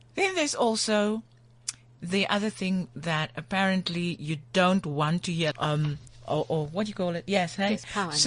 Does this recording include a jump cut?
yes; 1 cut; at 5.5 s

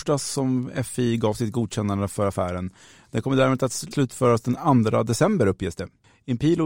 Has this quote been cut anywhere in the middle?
yes; 1 cut; at 3.9 s

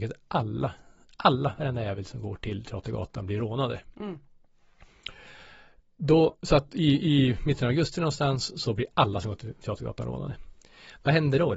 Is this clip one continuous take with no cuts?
yes; 0 cuts

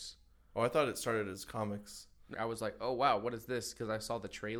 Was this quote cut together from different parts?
yes; 1 cut; at 2.3 s

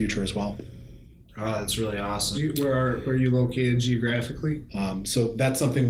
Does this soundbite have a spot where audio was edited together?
yes; 2 cuts; at 2.3 s, 4.7 s

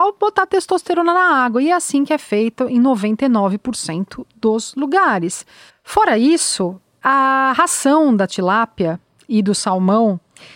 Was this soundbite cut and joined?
yes; 1 cut; at 5.7 s

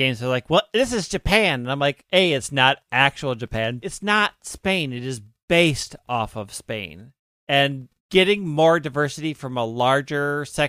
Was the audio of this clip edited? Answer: yes; 2 cuts; at 3.8 s, 8.0 s

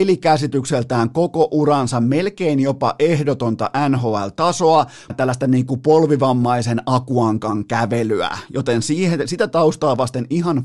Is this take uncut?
no; 1 cut; at 5.1 s

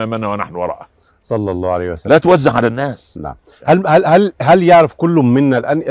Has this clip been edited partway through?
no; 0 cuts

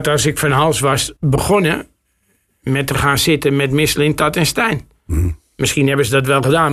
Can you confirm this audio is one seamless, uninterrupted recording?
no; 1 cut; at 1.2 s

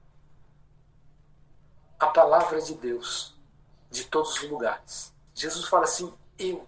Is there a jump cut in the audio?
yes; 1 cut; at 5.3 s

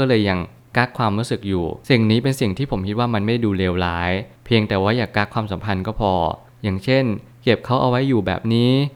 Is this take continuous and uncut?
yes; 0 cuts

